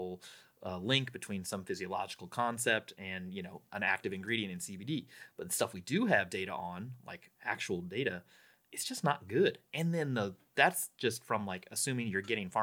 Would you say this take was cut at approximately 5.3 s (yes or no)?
no